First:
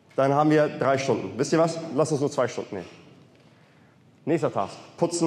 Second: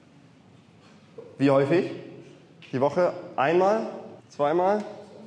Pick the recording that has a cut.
second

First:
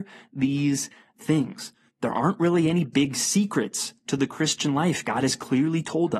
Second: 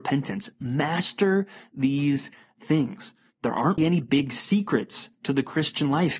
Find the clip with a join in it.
second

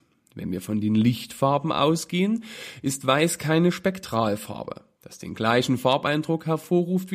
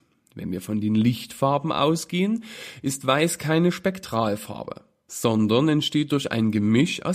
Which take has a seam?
first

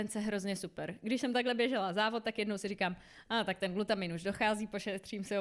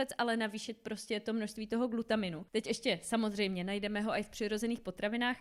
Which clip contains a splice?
second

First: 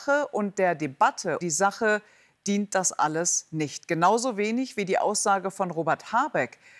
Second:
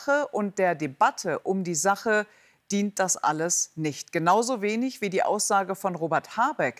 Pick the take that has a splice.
first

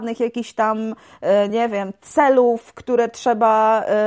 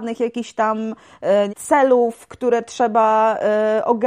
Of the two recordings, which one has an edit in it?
second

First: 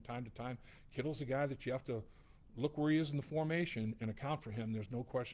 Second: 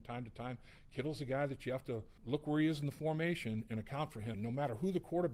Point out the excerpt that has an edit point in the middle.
second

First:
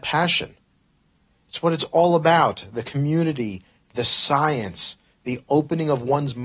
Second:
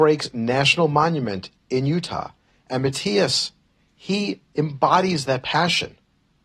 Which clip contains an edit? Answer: second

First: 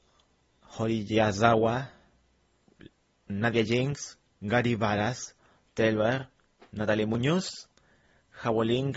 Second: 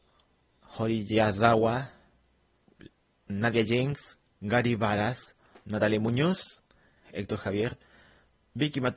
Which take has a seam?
second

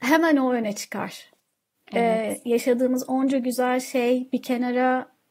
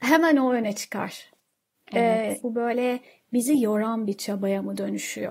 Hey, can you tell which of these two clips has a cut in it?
second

